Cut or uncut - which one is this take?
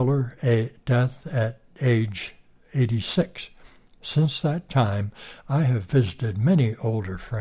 uncut